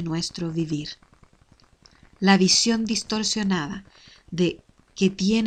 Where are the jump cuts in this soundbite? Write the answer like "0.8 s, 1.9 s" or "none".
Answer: none